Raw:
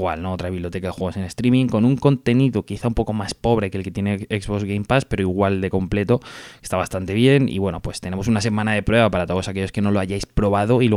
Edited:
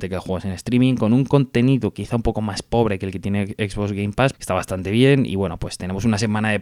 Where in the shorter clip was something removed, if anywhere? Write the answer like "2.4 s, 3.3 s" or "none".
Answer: 4.3 s